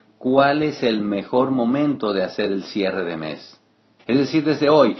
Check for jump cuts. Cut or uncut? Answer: cut